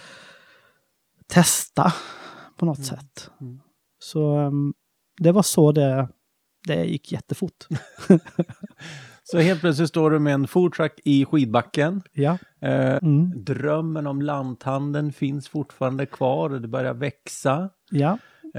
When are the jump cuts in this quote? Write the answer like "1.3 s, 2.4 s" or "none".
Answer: 13.0 s

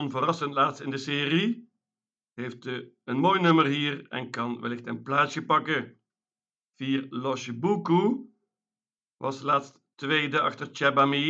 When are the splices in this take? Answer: none

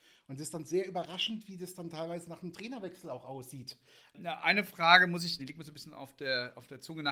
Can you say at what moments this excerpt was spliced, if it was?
4.1 s, 5.4 s

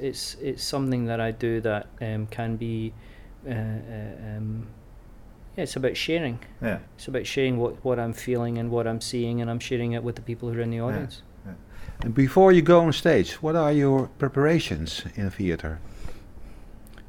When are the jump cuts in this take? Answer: 3.4 s, 6.9 s

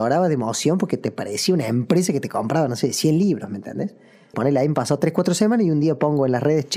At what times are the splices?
4.3 s

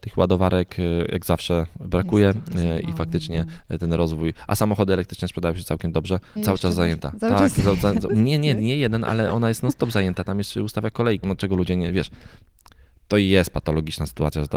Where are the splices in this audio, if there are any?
6.4 s, 8.1 s, 11.2 s

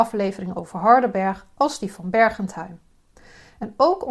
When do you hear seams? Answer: none

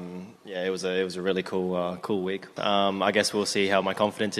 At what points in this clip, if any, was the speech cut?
2.6 s

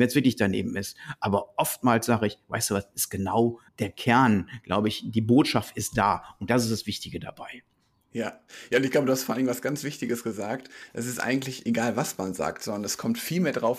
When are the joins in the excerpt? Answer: 3.7 s

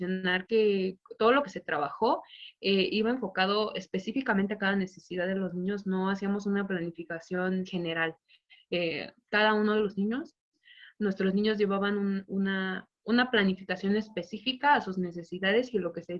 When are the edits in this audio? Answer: none

